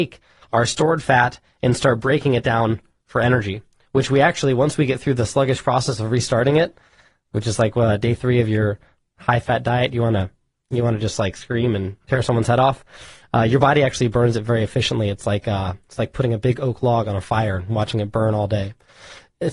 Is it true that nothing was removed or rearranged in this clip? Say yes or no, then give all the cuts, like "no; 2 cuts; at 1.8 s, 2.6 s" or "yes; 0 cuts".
yes; 0 cuts